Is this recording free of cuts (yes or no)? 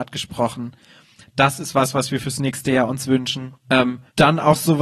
yes